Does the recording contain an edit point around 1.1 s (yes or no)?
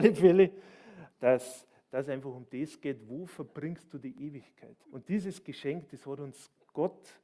yes